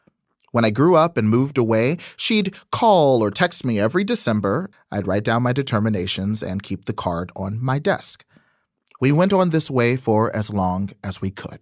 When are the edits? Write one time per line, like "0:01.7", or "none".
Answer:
0:04.7